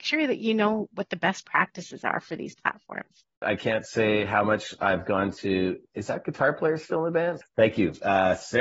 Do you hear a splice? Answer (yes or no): yes